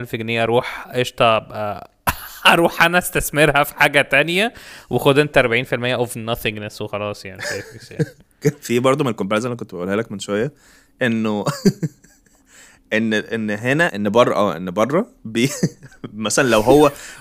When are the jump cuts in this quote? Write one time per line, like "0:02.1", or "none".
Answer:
0:13.9
0:15.2